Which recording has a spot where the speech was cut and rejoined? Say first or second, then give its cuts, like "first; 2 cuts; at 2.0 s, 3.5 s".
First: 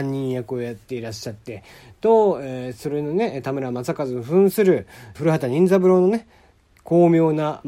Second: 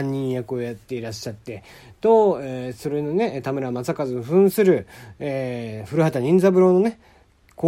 first; 1 cut; at 5.1 s